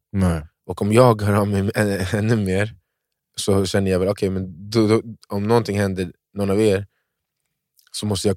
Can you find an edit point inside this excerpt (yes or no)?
yes